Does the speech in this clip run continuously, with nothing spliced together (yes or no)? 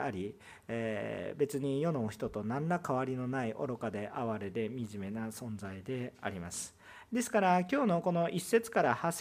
no